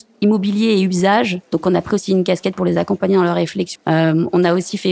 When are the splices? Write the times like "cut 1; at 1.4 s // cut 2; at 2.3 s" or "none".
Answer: cut 1; at 1.4 s // cut 2; at 3.8 s